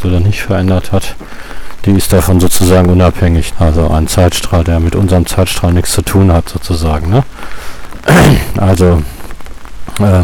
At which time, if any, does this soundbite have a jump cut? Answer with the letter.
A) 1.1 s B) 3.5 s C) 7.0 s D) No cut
B